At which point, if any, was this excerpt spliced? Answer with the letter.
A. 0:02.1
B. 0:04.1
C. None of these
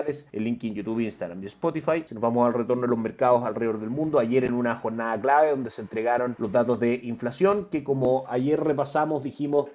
A